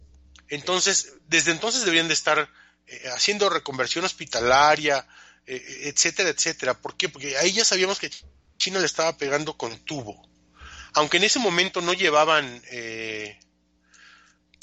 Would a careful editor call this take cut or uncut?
uncut